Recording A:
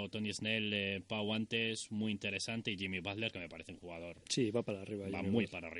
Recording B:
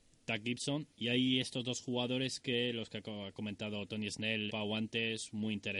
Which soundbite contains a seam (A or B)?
B